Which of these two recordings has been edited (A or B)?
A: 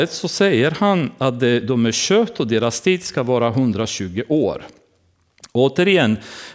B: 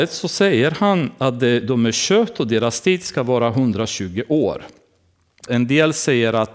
B